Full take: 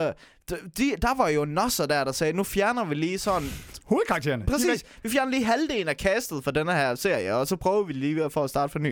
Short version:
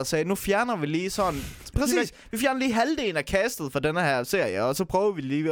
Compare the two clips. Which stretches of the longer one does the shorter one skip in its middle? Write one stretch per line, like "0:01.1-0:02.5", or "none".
0:03.8-0:04.5